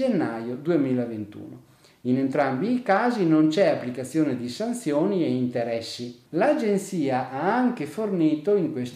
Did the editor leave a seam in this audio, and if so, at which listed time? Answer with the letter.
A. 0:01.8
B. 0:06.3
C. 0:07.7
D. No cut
B